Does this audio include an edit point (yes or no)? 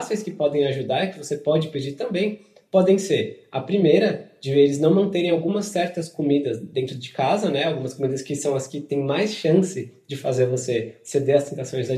no